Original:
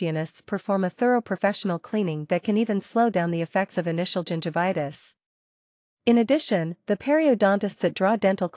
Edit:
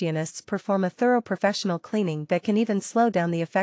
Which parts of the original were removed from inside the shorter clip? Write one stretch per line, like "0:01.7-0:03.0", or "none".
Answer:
none